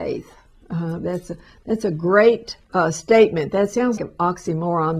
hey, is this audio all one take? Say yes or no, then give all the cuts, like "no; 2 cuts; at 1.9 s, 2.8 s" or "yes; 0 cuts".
no; 2 cuts; at 2.6 s, 4.0 s